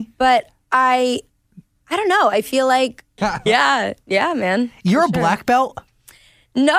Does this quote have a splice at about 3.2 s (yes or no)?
yes